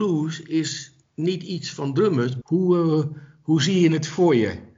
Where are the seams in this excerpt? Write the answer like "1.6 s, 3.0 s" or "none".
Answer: 2.4 s